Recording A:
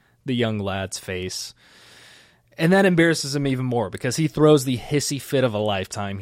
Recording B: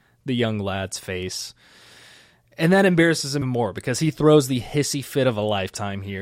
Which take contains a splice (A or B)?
B